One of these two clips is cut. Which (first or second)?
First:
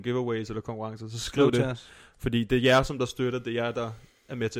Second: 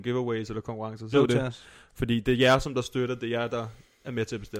second